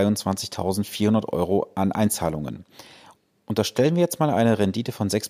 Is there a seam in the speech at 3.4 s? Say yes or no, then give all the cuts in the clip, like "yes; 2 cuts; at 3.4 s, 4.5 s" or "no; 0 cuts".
no; 0 cuts